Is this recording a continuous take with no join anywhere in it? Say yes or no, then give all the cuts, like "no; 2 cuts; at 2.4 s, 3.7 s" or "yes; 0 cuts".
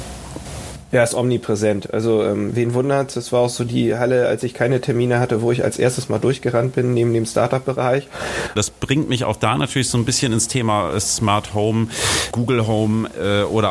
no; 2 cuts; at 8.6 s, 12.3 s